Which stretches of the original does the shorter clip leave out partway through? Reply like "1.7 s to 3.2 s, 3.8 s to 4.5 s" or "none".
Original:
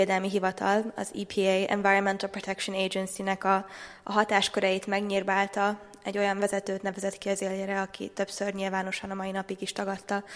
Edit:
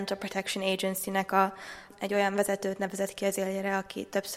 4.0 s to 5.9 s